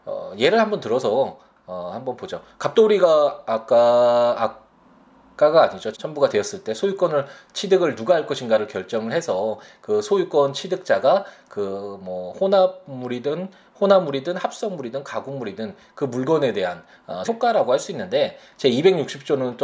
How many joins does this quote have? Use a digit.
2